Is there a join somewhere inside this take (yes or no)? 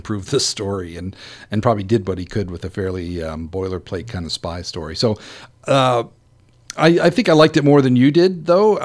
no